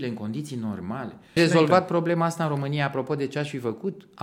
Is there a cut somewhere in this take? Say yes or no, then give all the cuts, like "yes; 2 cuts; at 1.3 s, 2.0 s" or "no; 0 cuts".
yes; 1 cut; at 1.4 s